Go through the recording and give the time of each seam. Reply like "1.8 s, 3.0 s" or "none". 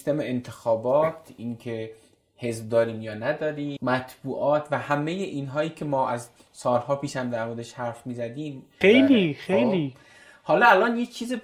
3.8 s, 8.8 s